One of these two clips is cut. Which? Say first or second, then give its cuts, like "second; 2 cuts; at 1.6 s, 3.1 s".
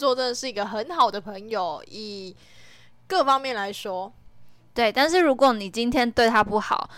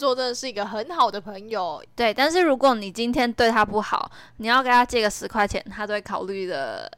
second; 1 cut; at 1.9 s